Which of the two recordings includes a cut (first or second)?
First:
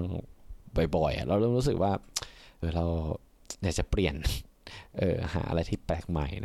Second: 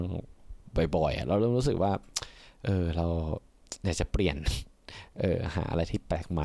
first